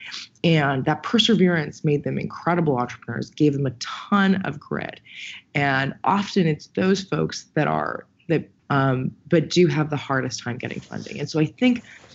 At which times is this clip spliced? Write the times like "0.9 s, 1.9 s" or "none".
8.6 s